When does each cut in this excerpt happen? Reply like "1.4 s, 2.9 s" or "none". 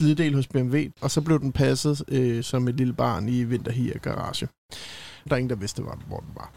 0.9 s, 5.3 s